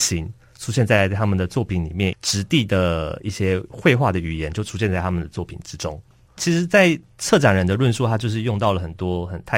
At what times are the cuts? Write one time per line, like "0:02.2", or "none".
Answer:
0:02.1